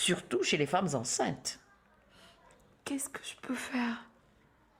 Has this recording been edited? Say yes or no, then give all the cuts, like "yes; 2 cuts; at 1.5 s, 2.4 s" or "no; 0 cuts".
no; 0 cuts